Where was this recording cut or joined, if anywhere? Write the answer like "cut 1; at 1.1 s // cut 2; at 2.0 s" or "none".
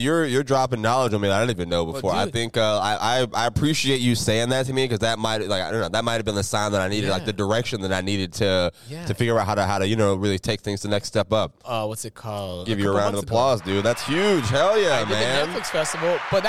cut 1; at 11.6 s